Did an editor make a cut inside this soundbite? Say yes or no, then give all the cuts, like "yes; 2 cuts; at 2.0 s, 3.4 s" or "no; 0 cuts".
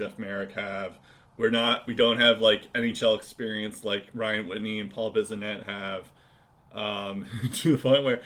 yes; 1 cut; at 6.6 s